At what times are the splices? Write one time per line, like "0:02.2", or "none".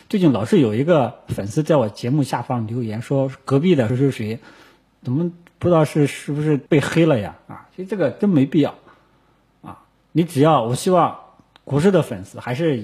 0:03.9
0:06.7